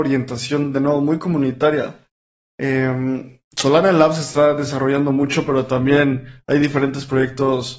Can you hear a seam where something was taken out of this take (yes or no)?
no